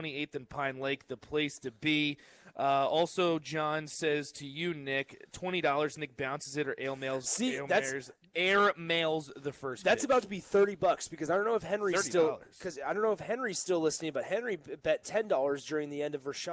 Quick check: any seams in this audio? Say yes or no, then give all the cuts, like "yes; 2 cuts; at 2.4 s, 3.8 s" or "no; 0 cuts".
no; 0 cuts